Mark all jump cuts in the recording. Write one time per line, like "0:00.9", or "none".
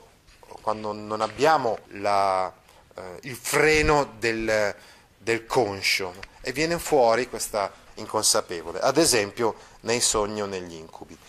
0:01.8
0:07.9

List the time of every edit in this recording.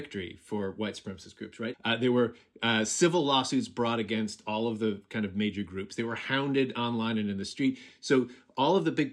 0:01.7

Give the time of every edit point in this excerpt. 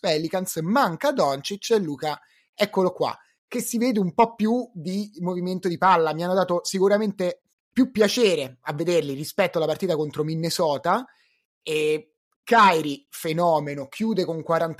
none

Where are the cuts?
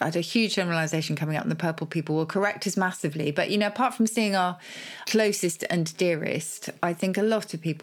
none

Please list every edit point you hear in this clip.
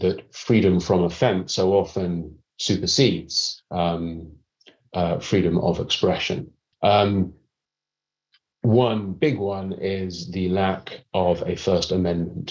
0:06.7

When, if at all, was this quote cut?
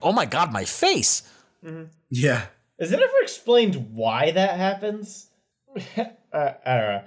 0:05.5

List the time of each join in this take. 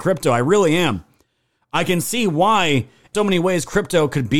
0:03.1

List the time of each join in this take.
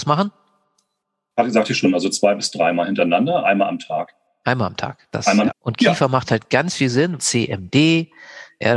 0:05.5
0:07.2

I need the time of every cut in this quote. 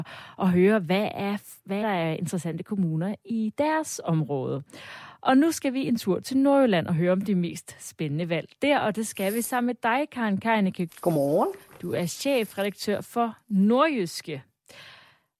0:01.8
0:10.9

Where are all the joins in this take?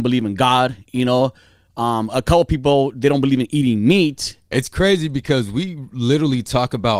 none

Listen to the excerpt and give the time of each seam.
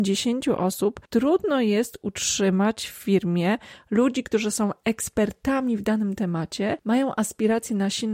none

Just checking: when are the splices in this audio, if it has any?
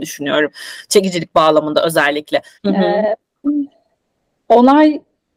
0:02.6

